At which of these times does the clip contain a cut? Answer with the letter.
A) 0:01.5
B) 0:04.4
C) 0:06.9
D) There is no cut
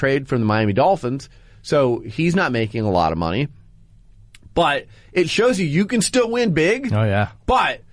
D